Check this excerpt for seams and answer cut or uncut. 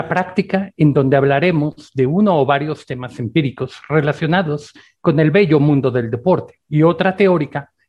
cut